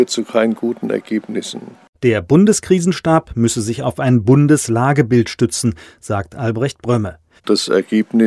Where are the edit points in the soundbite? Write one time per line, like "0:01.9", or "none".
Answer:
0:07.4